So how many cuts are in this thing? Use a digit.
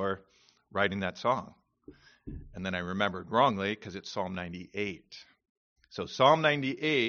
0